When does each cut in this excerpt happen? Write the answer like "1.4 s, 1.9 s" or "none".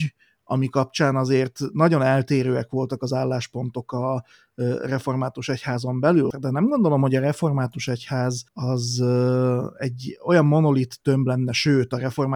6.3 s, 8.5 s

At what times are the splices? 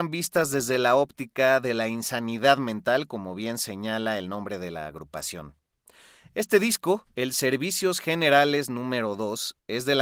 none

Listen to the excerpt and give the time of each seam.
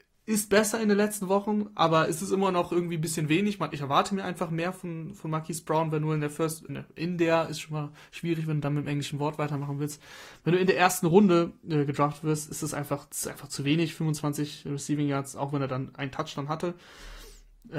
6.7 s

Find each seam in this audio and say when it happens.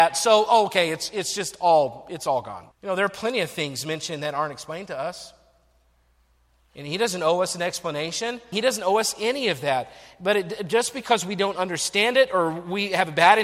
2.7 s, 8.5 s

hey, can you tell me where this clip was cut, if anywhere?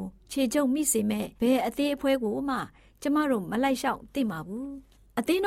1.4 s

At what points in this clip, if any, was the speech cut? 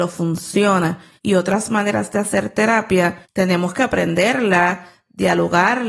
1.2 s, 3.2 s

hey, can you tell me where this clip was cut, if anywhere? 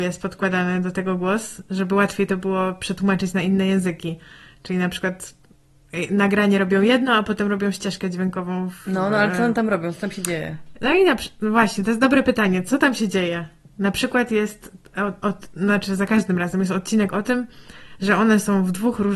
none

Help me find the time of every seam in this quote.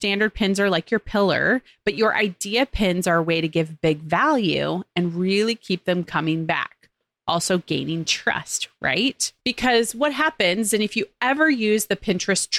9.4 s

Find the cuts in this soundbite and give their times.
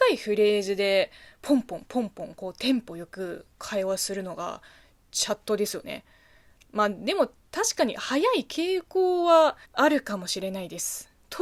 6.6 s, 9.6 s

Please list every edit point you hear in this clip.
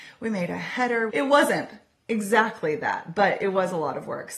1.1 s

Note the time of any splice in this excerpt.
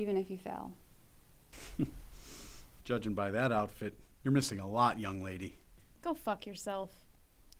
2.8 s

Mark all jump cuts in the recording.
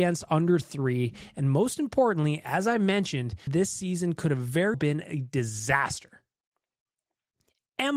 3.5 s, 4.7 s

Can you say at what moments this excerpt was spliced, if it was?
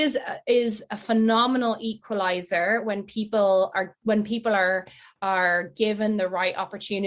none

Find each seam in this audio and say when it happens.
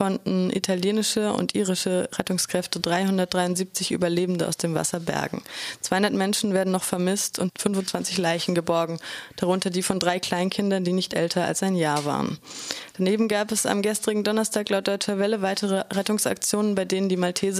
7.5 s

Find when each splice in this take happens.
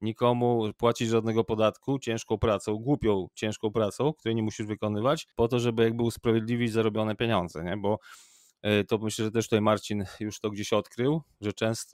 5.3 s

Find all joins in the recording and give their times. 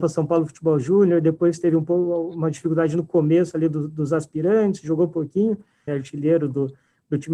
5.9 s

